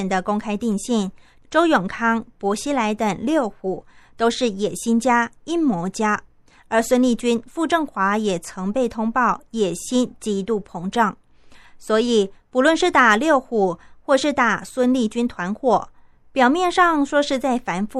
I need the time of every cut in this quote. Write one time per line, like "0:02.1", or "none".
none

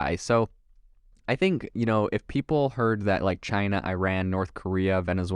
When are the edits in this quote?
none

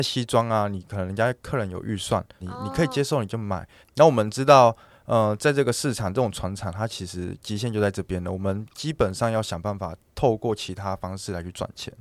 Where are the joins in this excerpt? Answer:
0:02.4
0:03.8

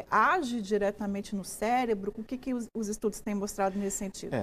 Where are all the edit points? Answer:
0:02.1

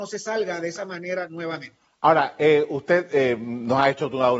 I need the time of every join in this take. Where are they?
none

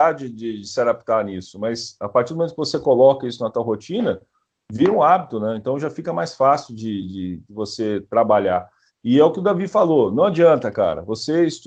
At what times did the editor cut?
none

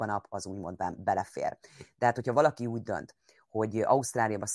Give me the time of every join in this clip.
none

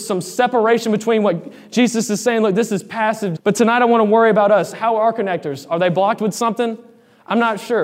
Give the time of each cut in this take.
0:03.4

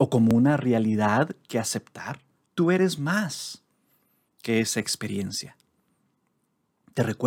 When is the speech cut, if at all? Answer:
0:02.5

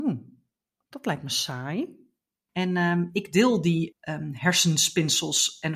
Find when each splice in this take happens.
0:02.5
0:03.9

